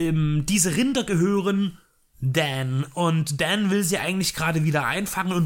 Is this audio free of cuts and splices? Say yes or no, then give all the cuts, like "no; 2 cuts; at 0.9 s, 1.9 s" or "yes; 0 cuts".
yes; 0 cuts